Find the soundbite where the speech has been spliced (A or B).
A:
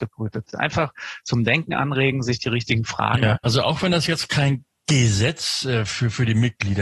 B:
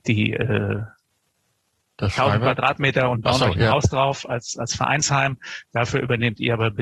A